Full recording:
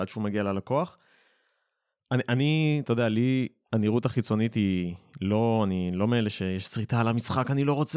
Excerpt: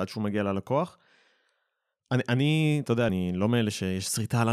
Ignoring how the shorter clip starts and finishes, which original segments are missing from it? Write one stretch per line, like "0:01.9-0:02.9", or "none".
0:03.1-0:05.7